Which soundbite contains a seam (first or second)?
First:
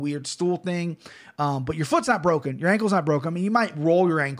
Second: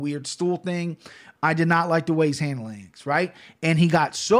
second